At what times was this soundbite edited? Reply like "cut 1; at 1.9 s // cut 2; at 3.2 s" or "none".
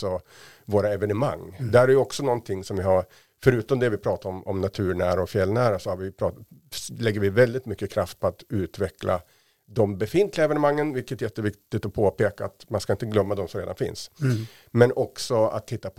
none